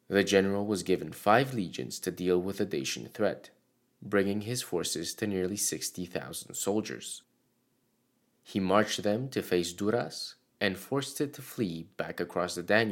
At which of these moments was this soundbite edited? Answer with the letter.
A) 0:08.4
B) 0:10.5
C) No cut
B